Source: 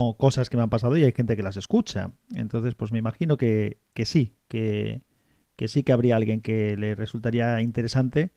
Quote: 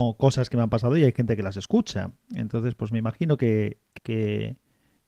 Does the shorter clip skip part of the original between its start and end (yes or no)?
yes